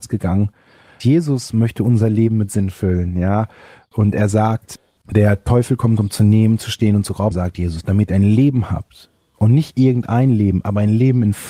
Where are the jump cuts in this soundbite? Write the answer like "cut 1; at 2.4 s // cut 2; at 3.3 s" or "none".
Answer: cut 1; at 1.0 s // cut 2; at 7.3 s